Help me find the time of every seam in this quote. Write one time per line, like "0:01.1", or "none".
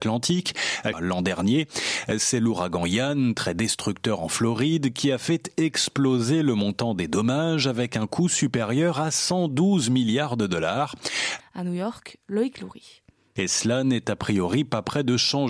0:00.9
0:11.4
0:13.4